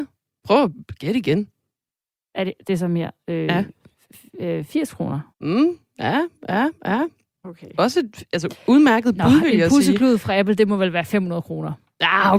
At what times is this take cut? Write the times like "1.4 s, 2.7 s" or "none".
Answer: 5.3 s